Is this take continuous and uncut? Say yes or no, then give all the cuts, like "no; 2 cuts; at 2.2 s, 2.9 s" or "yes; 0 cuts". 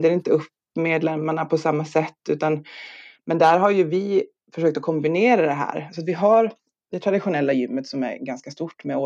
yes; 0 cuts